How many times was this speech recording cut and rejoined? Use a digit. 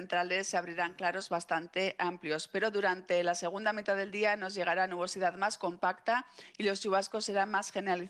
0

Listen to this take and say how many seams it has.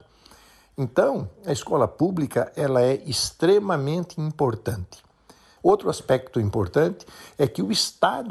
1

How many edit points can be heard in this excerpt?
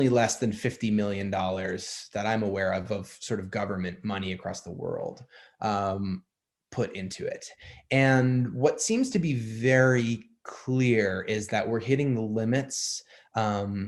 0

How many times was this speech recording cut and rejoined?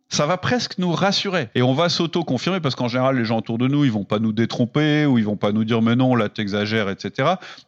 1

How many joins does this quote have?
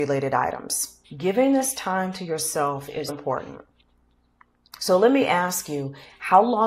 2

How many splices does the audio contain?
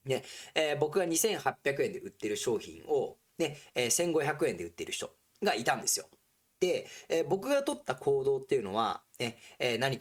0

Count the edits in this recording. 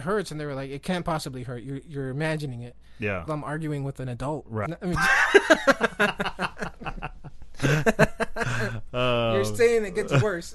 2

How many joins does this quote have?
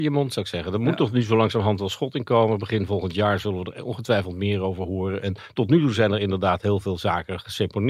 0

